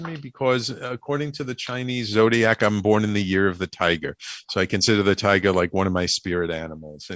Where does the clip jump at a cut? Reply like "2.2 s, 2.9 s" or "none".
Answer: none